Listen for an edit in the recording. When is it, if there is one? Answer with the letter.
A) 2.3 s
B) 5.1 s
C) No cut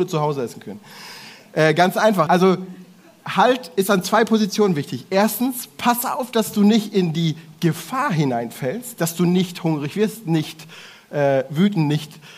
A